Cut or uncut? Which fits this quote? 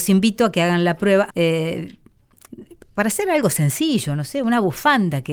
cut